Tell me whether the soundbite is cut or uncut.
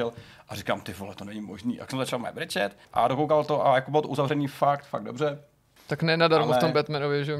cut